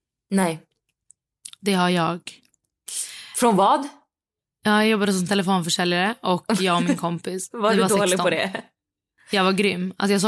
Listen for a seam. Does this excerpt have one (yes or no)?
no